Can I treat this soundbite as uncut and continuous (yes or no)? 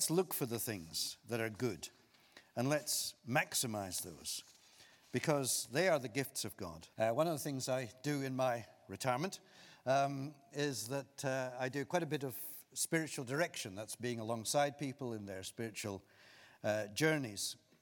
no